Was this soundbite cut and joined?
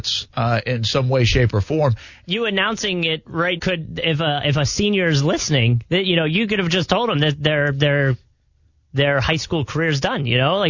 yes; 2 cuts; at 2.2 s, 3.6 s

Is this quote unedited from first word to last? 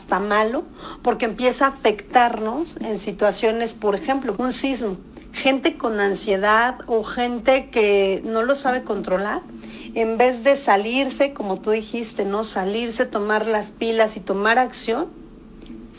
no; 1 cut; at 4.3 s

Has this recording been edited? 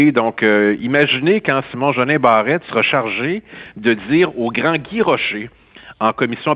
no; 0 cuts

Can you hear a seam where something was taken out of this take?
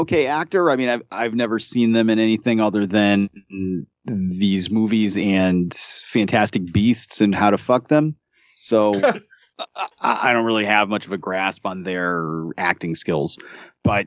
no; 0 cuts

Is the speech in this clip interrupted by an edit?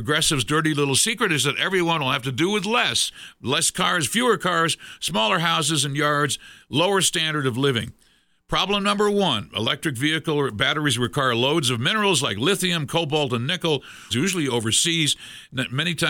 yes; 1 cut; at 14.1 s

